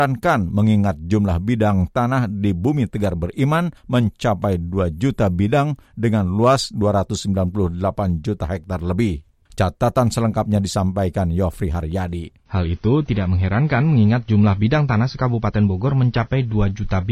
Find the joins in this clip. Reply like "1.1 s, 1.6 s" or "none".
12.5 s